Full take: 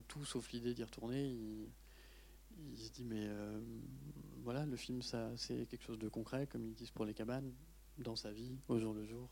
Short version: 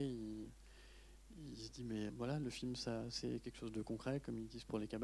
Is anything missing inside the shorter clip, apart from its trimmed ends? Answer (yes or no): yes